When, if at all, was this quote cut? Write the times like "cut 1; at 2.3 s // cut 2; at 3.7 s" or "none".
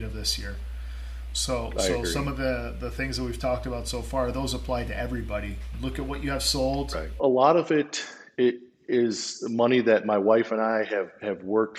cut 1; at 7.2 s